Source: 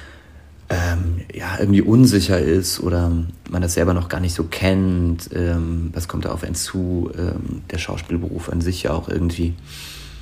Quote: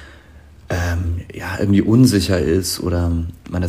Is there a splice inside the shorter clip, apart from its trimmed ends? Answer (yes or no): no